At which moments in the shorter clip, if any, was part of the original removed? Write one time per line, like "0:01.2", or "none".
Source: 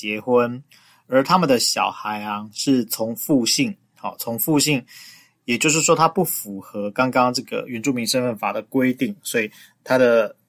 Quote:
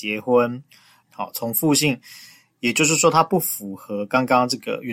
0:01.0